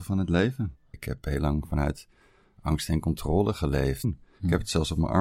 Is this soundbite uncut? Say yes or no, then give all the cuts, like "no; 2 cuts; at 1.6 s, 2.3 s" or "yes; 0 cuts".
no; 2 cuts; at 0.9 s, 4.0 s